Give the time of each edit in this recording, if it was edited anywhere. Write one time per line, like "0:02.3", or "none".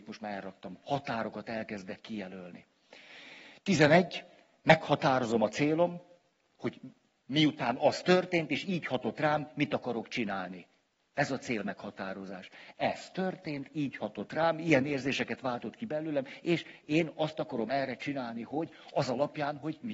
none